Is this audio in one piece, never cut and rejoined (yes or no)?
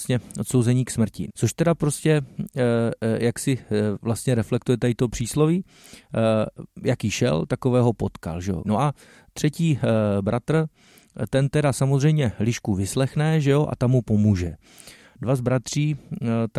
no